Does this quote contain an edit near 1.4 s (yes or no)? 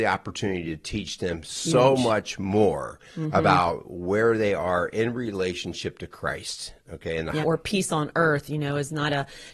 no